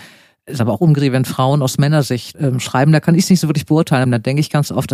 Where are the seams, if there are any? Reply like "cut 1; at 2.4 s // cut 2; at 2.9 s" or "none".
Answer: cut 1; at 2.3 s // cut 2; at 4.0 s